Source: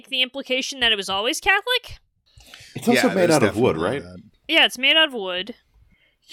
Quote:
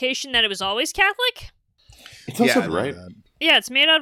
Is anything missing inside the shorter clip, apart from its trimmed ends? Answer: yes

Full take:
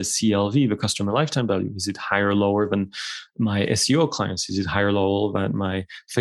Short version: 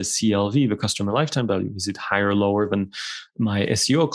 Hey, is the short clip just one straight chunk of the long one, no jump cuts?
yes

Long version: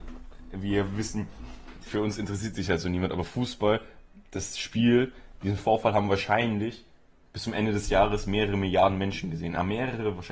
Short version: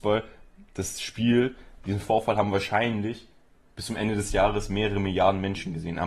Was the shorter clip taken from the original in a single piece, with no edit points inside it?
yes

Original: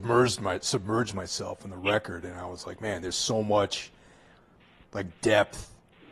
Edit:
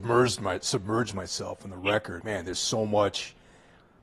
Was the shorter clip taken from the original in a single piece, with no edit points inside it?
no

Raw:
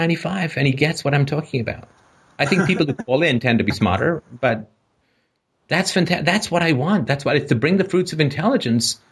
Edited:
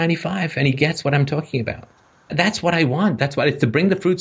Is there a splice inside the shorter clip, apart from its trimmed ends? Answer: yes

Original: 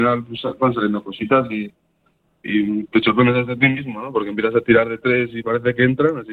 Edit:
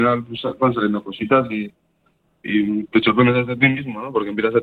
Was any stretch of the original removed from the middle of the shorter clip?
no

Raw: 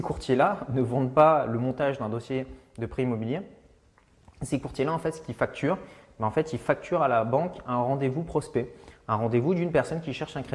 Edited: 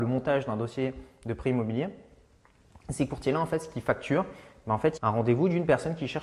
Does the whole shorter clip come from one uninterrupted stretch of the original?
no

